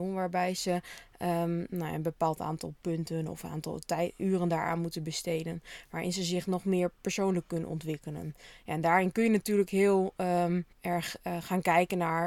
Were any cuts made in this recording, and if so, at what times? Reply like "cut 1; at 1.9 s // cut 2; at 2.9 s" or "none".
cut 1; at 10.7 s